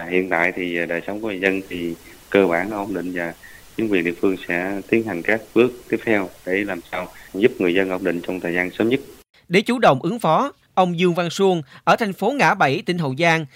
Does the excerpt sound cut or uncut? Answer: cut